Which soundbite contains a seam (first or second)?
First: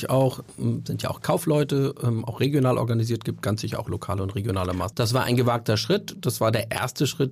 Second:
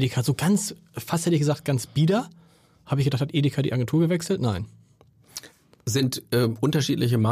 first